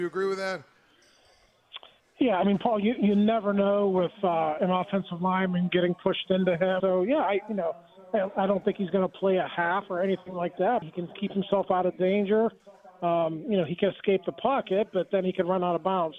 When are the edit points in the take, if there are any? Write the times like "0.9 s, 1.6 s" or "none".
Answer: 6.8 s, 10.8 s